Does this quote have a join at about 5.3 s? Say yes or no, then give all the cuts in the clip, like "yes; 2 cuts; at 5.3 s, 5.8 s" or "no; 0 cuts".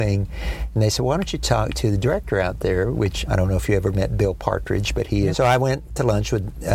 yes; 1 cut; at 5.3 s